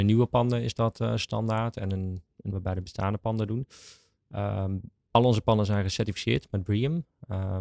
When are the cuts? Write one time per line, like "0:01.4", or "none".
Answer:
0:02.5